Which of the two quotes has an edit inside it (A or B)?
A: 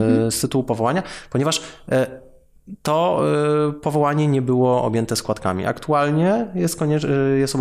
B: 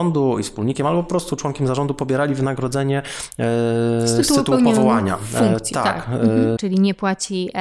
B